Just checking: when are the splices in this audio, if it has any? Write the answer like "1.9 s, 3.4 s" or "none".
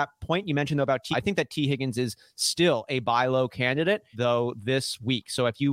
1.1 s, 4.1 s